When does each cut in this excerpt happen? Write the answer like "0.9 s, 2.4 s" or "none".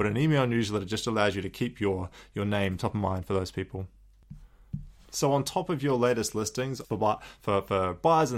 6.8 s